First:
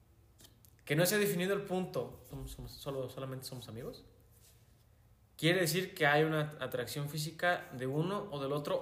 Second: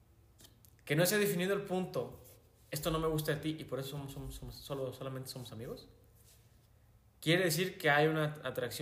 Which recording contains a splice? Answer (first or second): first